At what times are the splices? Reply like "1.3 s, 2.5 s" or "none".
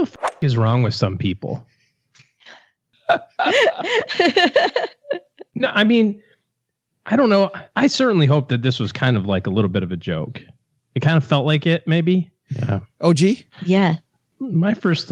7.7 s, 12.5 s